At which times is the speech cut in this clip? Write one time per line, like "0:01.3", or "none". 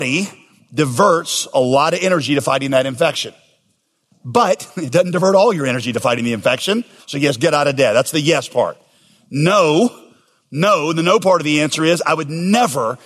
0:04.1
0:07.0